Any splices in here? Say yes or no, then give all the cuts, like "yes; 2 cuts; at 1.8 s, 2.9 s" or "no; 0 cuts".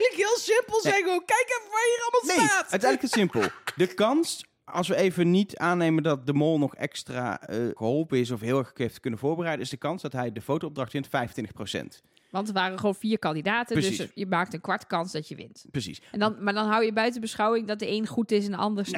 yes; 1 cut; at 7.8 s